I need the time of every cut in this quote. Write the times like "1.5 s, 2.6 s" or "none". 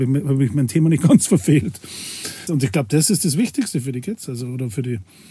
2.5 s